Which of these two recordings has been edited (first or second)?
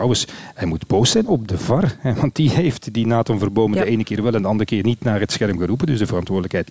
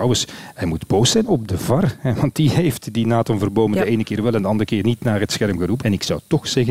second